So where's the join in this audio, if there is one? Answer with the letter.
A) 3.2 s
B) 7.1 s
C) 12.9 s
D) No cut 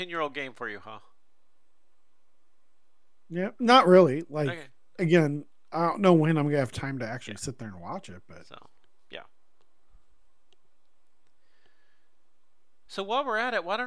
D